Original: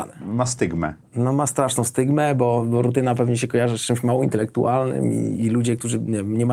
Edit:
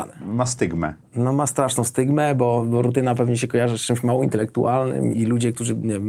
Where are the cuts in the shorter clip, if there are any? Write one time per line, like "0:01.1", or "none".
0:05.1